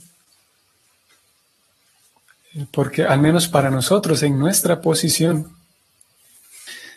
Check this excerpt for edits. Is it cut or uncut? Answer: uncut